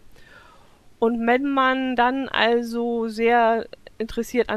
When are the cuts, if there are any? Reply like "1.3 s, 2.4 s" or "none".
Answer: none